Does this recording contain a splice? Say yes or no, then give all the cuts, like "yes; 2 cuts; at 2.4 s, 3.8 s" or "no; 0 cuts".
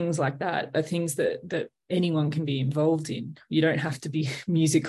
no; 0 cuts